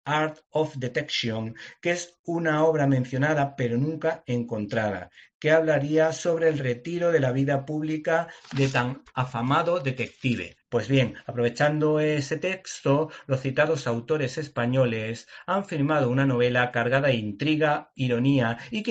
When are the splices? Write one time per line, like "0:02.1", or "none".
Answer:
0:10.6
0:17.9